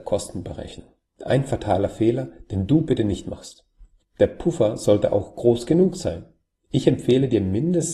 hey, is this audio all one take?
yes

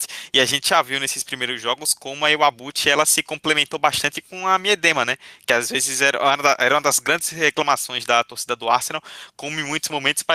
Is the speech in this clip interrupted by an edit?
no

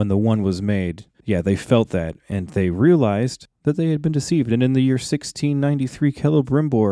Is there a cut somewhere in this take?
no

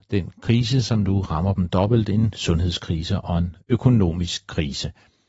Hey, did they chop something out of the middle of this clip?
no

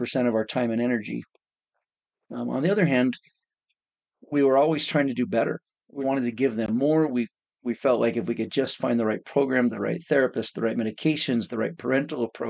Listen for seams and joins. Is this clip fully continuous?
no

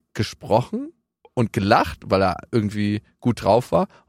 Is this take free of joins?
yes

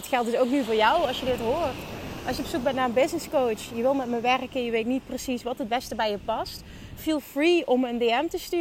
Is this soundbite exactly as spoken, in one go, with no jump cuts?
yes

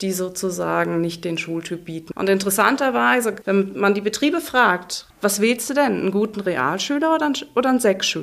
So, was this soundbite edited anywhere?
yes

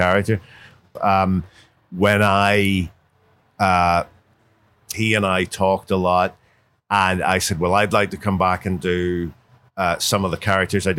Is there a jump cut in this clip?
yes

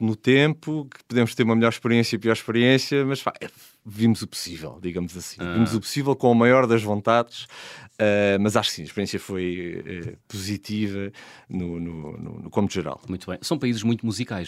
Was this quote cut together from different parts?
no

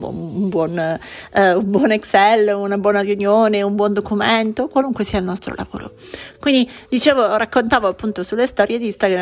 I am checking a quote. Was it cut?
no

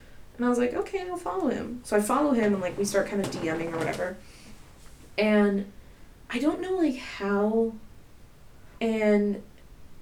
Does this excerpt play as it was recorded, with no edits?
no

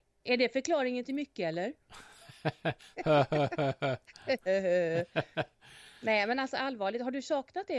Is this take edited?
no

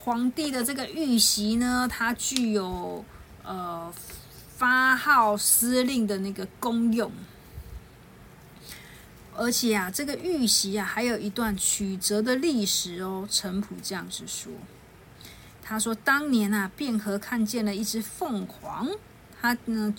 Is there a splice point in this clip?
no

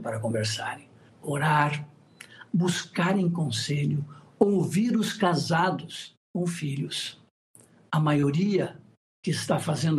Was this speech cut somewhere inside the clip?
yes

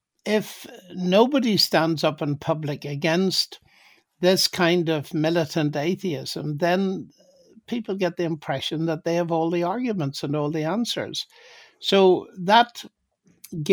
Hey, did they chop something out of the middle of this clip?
no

